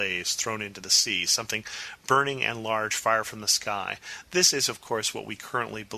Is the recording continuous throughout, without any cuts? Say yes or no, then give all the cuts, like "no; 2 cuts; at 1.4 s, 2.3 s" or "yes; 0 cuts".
yes; 0 cuts